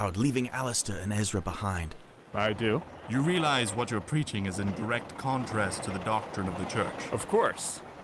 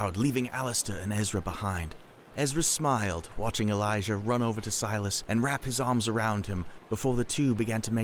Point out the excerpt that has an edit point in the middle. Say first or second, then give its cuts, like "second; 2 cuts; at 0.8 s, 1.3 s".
first; 1 cut; at 2.3 s